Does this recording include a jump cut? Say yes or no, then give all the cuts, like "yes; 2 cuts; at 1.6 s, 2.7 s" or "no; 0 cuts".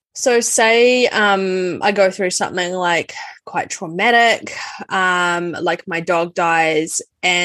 no; 0 cuts